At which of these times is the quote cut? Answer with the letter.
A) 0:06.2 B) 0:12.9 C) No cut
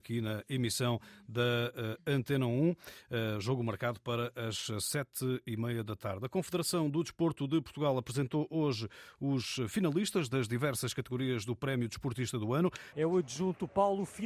B